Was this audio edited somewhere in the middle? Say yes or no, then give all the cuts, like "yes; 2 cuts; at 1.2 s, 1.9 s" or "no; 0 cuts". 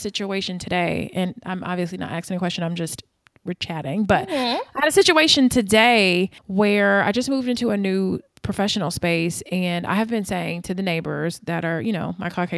yes; 1 cut; at 6.4 s